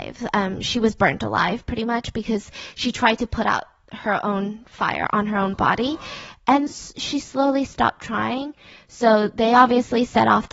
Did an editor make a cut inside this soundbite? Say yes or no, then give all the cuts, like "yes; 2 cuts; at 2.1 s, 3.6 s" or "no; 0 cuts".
yes; 1 cut; at 6.7 s